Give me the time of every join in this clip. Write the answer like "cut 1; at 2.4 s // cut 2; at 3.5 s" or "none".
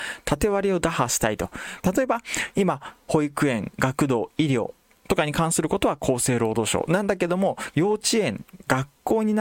cut 1; at 1.8 s // cut 2; at 7.7 s